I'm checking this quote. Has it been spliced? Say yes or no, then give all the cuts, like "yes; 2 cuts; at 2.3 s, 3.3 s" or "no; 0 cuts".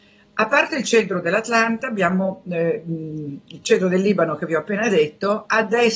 no; 0 cuts